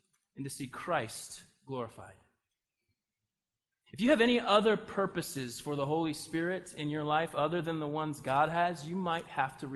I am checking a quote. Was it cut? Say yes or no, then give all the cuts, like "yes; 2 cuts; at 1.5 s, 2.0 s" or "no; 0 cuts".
no; 0 cuts